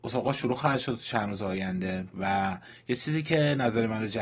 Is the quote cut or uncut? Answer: cut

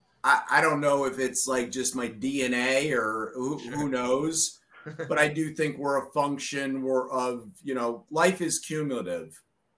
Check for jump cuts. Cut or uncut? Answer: uncut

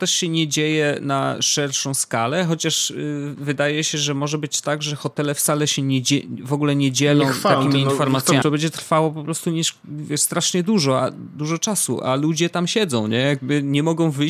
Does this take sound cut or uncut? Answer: cut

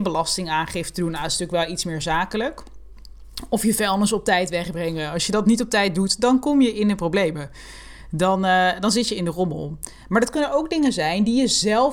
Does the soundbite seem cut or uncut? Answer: uncut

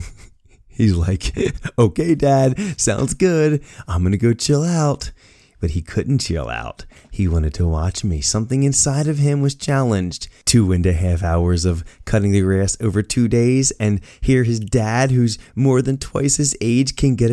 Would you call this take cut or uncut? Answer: uncut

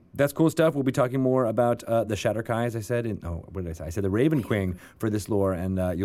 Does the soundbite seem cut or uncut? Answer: uncut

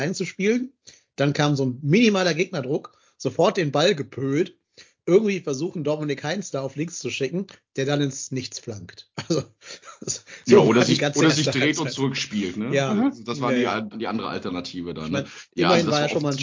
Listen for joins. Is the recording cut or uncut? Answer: cut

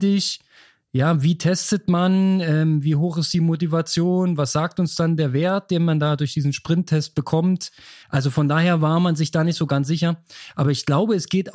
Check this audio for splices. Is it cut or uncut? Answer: cut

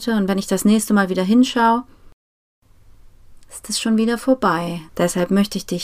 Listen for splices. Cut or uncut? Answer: cut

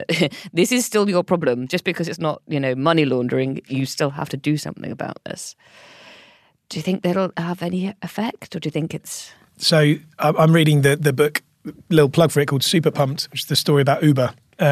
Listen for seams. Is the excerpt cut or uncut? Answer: uncut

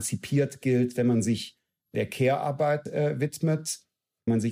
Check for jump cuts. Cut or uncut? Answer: uncut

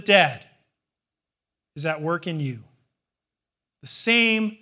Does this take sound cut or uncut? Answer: uncut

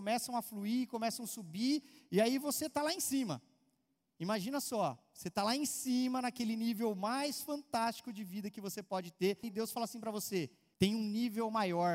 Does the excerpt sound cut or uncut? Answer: cut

